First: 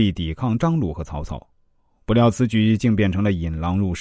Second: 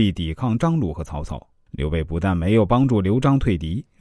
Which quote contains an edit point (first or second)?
second